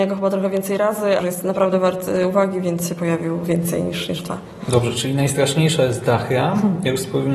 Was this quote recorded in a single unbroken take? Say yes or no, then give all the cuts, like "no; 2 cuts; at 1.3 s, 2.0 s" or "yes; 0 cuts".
no; 1 cut; at 1.2 s